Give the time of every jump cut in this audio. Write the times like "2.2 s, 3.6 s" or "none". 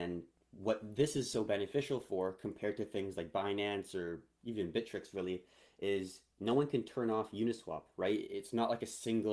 none